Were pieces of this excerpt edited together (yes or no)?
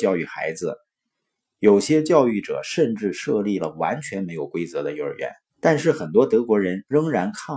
yes